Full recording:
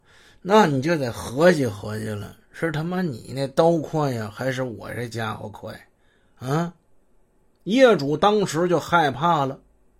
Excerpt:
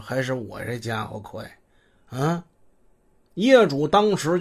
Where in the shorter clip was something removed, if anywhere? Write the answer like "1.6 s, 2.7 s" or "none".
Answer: none